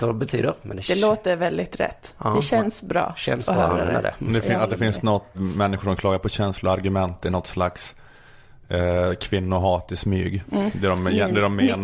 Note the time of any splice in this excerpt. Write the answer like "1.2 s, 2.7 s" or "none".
5.3 s